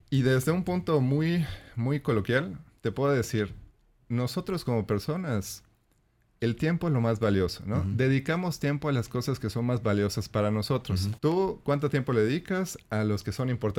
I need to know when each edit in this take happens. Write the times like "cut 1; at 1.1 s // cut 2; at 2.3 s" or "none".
cut 1; at 11.2 s